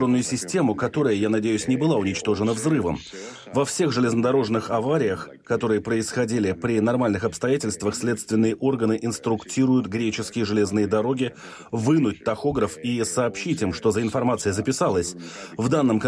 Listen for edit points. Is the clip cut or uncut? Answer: uncut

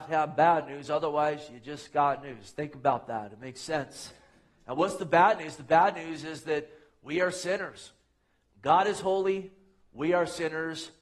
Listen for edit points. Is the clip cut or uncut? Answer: uncut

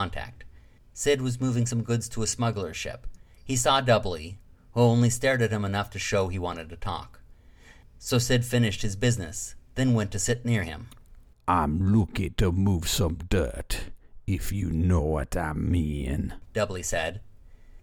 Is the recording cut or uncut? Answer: uncut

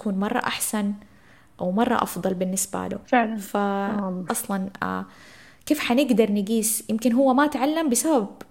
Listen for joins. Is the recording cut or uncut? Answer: cut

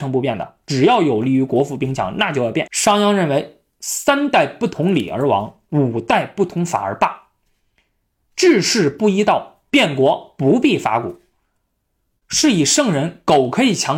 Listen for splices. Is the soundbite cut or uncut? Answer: cut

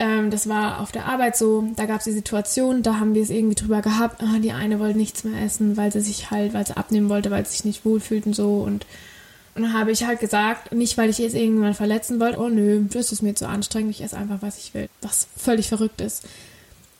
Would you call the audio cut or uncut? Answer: cut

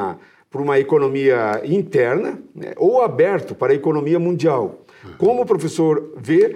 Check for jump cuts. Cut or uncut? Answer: uncut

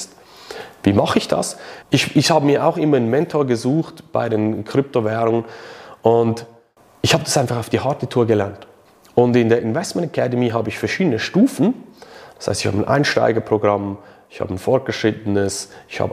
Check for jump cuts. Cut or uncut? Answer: cut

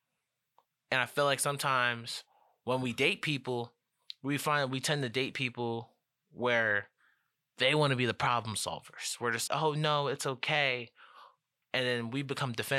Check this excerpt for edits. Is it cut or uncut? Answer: cut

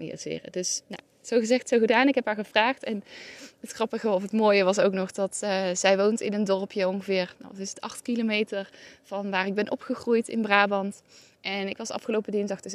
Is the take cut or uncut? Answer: uncut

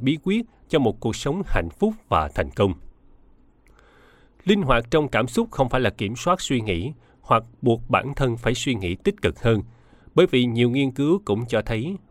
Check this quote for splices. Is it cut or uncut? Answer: uncut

